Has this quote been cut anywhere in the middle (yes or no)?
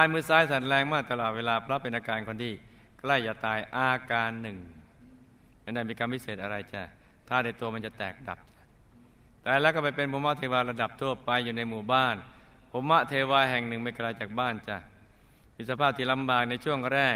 no